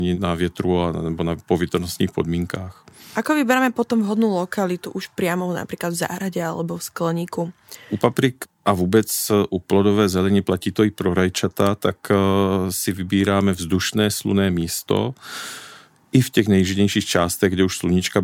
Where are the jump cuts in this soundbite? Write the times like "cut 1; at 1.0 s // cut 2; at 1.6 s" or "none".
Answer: none